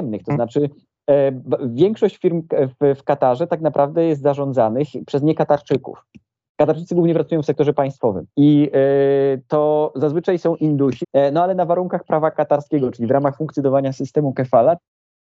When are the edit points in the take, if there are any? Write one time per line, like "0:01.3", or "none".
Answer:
0:11.0